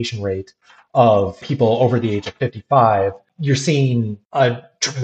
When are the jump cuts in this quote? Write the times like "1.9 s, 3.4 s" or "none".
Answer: none